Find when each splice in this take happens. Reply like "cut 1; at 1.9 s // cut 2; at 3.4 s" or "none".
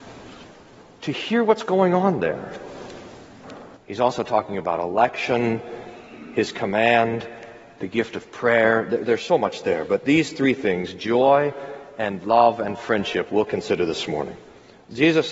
cut 1; at 3.8 s